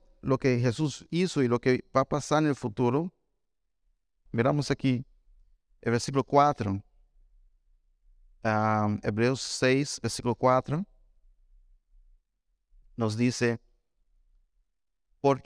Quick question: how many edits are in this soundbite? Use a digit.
1